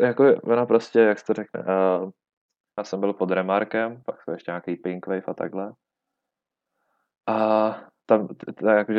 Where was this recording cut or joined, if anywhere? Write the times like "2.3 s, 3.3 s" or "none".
2.8 s